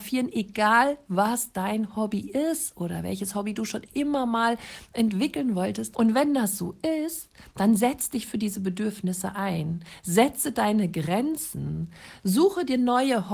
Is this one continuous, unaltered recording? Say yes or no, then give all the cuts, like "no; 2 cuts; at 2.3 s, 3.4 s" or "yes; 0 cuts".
no; 2 cuts; at 5.9 s, 12.2 s